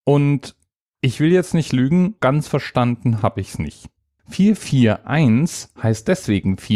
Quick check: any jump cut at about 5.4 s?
no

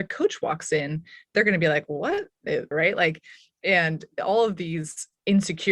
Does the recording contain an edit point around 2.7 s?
yes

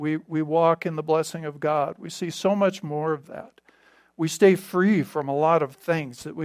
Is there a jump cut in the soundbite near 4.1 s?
no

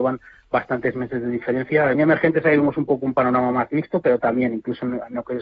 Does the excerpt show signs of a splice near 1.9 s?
yes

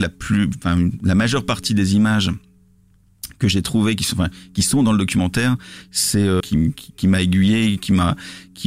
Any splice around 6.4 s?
yes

